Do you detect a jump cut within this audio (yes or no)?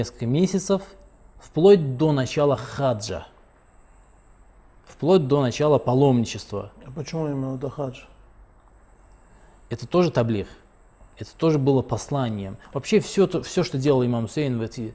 no